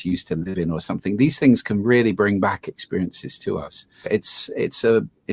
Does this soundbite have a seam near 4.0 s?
yes; 1 cut; at 4.0 s

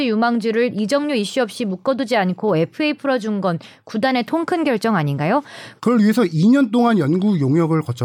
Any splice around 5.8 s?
yes; 1 cut; at 5.8 s

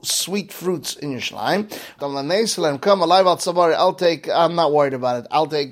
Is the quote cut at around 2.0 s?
yes; 1 cut; at 2.0 s

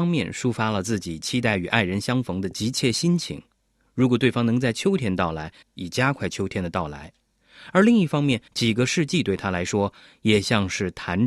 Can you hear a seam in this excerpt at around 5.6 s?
yes; 2 cuts; at 5.6 s, 8.5 s

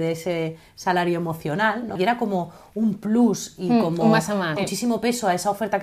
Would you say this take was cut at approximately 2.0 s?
yes; 2 cuts; at 2.0 s, 4.6 s

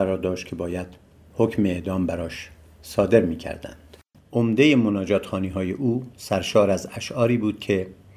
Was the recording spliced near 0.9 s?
no; 1 cut; at 4.1 s

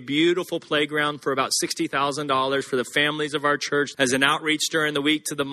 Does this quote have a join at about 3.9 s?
yes; 1 cut; at 3.9 s

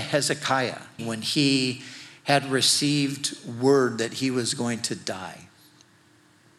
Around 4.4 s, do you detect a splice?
no; 1 cut; at 1.0 s

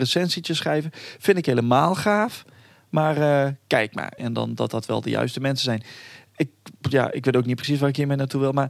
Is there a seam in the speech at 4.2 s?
yes; 1 cut; at 4.2 s

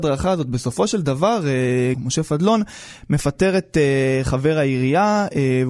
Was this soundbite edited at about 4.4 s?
no; 1 cut; at 1.9 s

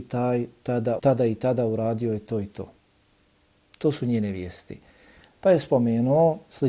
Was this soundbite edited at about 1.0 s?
yes; 2 cuts; at 1.0 s, 5.2 s

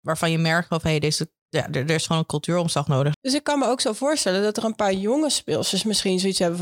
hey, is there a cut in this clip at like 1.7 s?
no; 1 cut; at 3.1 s

